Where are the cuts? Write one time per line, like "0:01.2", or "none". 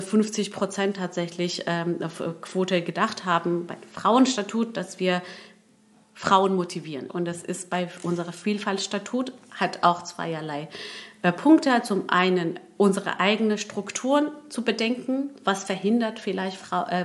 0:07.1